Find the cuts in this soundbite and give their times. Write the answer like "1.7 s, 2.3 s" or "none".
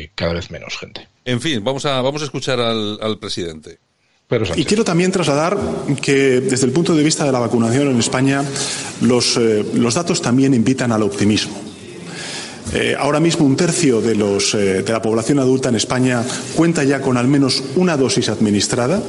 1.2 s